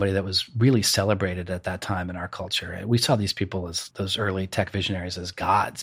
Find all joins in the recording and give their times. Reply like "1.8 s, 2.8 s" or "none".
3.9 s